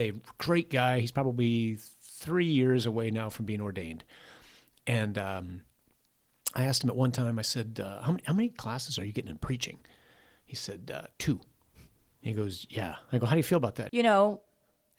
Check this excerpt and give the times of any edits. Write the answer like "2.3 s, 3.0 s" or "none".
12.2 s, 13.9 s

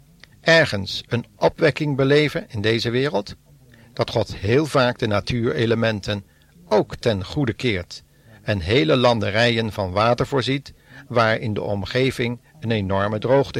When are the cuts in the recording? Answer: none

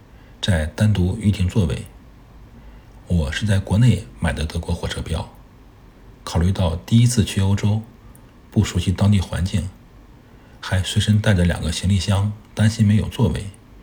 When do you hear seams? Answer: none

